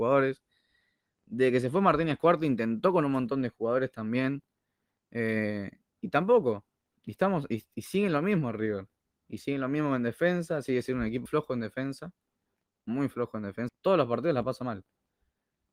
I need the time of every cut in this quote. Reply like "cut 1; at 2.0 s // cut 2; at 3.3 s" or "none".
cut 1; at 11.3 s // cut 2; at 13.7 s